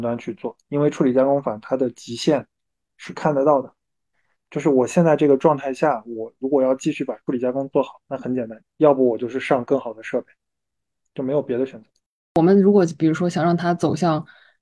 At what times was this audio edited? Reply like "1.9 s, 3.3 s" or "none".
8.6 s